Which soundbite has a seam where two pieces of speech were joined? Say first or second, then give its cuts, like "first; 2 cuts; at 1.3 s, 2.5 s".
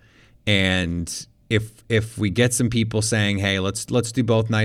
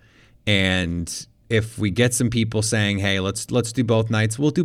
second; 1 cut; at 1.4 s